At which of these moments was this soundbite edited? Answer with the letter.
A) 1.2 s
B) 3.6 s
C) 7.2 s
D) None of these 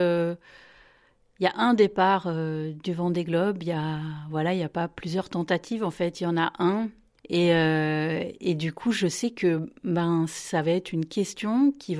C